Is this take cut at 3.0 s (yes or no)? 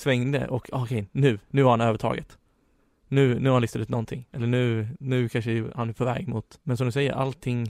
no